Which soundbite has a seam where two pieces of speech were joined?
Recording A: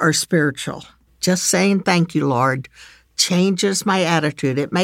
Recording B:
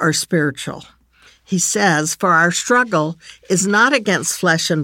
A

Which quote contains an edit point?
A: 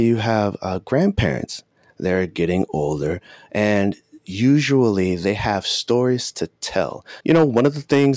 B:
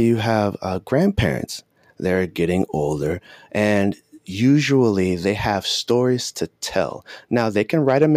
A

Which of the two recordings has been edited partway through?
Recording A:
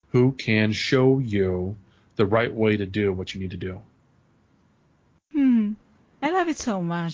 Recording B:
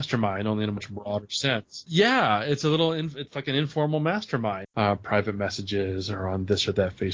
B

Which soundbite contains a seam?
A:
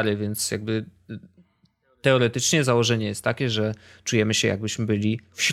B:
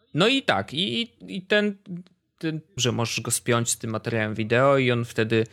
B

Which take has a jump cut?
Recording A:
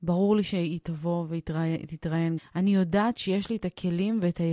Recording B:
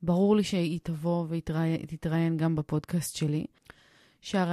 A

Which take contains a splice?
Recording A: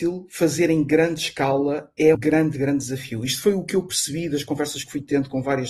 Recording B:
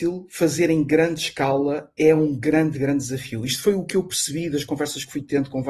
A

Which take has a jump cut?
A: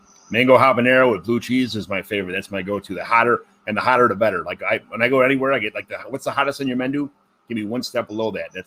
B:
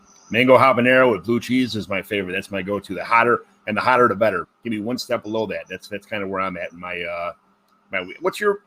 B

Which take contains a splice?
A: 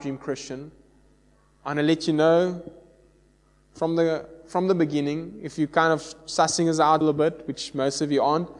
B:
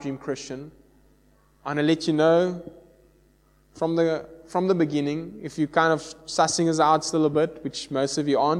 A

